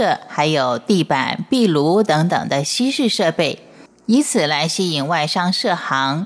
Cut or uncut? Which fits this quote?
uncut